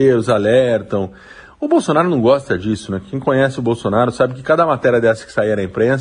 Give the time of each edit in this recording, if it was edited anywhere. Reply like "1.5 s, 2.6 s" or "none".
none